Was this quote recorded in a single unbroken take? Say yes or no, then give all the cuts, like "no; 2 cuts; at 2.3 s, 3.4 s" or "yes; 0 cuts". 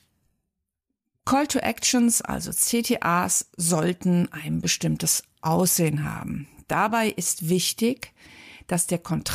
yes; 0 cuts